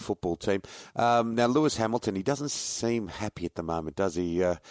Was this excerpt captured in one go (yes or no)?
yes